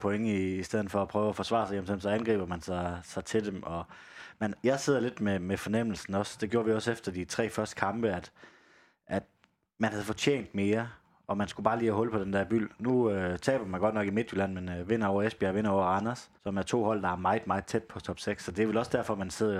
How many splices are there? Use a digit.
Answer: 1